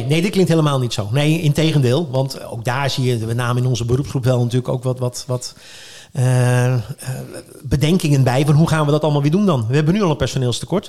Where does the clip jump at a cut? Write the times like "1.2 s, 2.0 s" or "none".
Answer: none